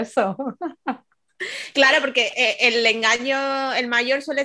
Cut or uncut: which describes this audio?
uncut